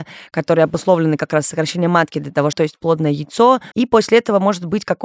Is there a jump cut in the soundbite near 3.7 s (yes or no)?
yes